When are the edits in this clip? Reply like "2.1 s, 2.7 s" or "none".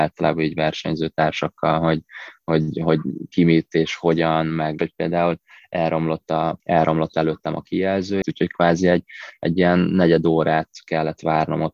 4.8 s, 6.6 s, 8.2 s